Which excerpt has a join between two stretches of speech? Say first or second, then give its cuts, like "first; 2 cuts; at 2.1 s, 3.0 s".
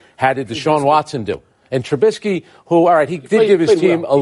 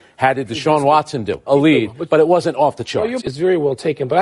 second; 2 cuts; at 1.5 s, 3.2 s